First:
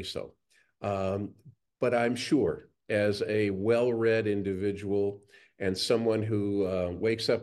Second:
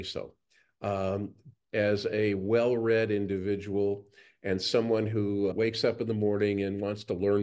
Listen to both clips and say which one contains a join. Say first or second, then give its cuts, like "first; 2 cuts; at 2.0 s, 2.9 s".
second; 2 cuts; at 1.6 s, 5.5 s